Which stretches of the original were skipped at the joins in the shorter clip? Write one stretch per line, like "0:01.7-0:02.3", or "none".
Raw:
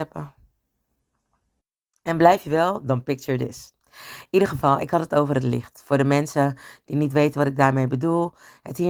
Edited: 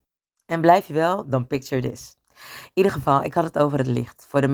none